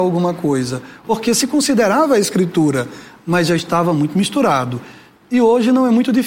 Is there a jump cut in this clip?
yes; 1 cut; at 1.0 s

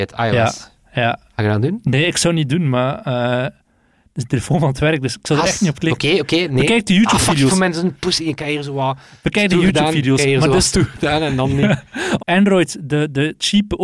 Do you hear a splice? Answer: yes; 1 cut; at 12.2 s

